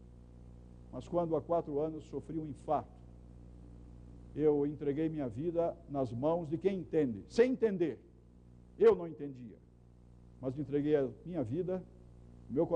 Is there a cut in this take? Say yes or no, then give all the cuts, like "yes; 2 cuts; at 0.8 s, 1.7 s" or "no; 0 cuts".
no; 0 cuts